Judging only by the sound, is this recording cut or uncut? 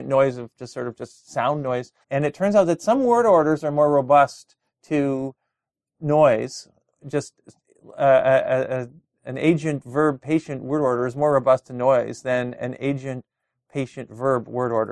cut